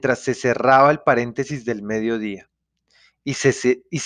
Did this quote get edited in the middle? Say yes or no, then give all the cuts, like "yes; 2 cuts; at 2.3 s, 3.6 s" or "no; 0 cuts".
no; 0 cuts